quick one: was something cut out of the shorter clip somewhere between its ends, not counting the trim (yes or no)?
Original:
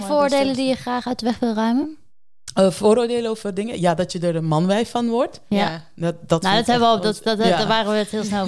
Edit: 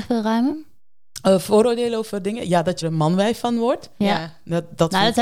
yes